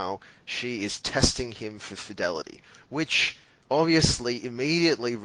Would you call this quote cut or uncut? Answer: uncut